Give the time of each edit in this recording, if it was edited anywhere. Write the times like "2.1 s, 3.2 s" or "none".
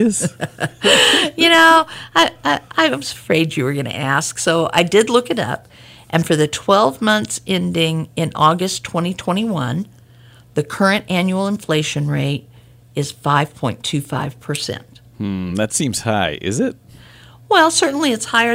none